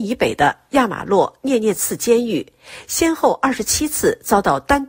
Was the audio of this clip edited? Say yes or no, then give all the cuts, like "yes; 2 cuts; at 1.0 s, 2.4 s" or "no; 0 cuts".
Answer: no; 0 cuts